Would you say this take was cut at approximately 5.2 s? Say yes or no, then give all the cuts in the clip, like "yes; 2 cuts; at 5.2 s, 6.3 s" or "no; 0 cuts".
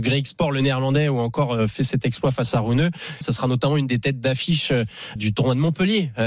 yes; 2 cuts; at 3.2 s, 5.2 s